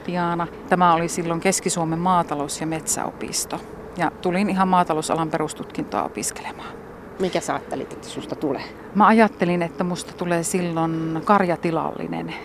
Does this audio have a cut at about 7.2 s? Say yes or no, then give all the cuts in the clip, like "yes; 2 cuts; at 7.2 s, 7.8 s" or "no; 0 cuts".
no; 0 cuts